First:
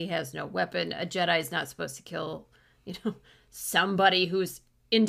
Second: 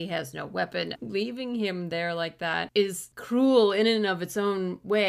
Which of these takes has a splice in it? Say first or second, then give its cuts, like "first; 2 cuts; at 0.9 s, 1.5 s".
second; 1 cut; at 0.9 s